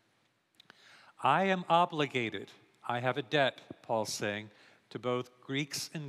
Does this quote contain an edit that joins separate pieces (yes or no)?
no